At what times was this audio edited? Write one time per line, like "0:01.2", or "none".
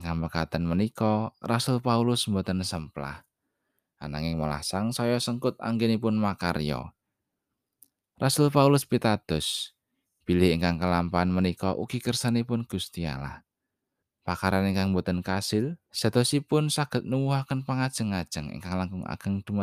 0:14.0
0:15.9